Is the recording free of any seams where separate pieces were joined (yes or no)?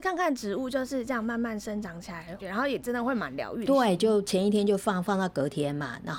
no